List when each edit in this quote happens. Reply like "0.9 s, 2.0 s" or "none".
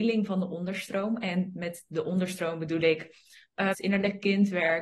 3.7 s